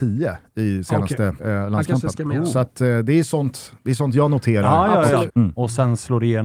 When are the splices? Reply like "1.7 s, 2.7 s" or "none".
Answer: 1.4 s, 5.3 s